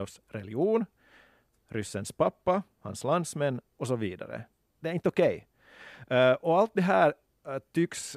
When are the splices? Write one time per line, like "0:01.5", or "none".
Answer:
none